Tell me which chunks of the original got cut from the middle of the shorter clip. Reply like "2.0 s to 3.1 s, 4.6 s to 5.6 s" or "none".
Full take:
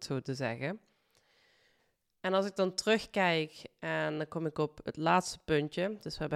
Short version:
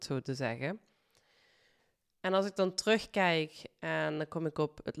none